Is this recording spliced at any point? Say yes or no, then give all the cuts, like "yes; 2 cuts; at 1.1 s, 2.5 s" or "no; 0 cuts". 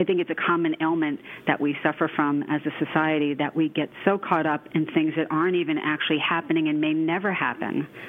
no; 0 cuts